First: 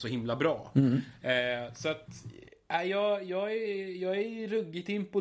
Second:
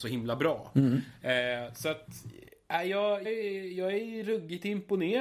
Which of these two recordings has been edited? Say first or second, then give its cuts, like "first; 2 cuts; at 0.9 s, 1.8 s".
second; 1 cut; at 3.2 s